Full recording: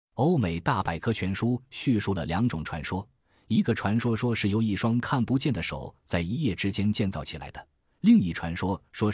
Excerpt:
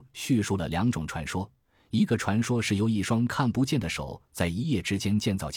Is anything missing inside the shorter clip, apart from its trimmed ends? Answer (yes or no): yes